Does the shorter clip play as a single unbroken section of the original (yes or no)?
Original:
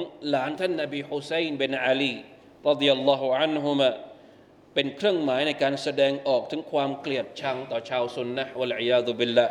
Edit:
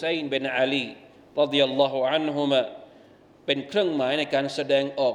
yes